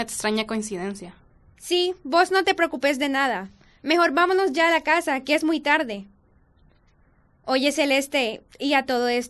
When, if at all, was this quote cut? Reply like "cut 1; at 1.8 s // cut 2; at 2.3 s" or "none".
none